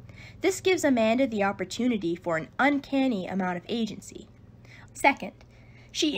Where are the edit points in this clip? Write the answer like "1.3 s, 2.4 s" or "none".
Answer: 4.9 s